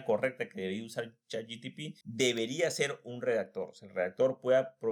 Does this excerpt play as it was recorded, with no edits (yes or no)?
no